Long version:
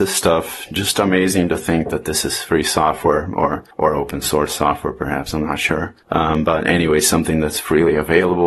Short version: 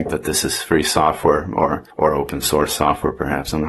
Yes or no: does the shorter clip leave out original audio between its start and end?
no